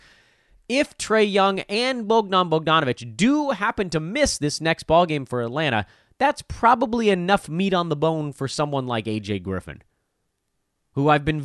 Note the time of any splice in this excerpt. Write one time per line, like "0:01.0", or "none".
none

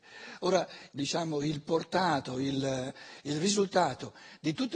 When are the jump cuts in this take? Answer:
0:00.9

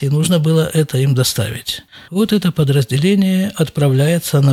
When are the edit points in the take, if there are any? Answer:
none

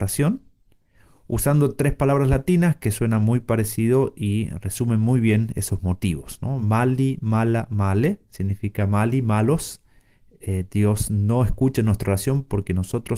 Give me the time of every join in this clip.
none

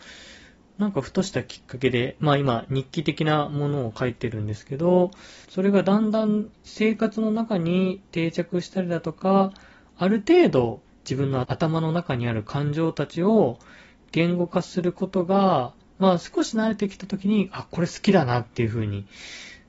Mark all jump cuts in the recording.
none

